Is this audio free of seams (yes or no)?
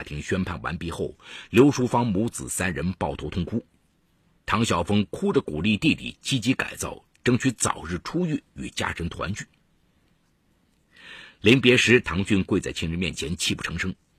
yes